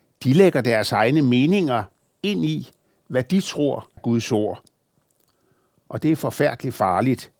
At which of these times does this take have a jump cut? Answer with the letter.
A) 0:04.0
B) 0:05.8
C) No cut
A